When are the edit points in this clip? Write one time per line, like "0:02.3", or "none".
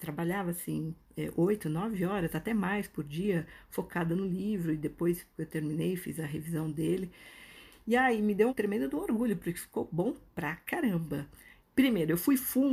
0:08.5
0:11.7